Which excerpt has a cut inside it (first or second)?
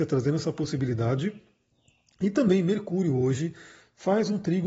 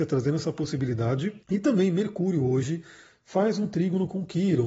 second